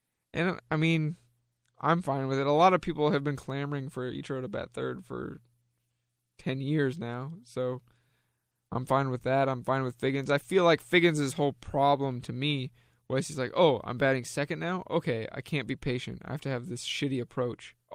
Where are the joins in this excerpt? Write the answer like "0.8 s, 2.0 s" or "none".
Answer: none